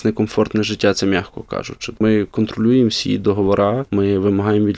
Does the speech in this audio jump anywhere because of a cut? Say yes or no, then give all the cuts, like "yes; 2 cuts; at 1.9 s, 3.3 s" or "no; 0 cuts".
yes; 1 cut; at 2.0 s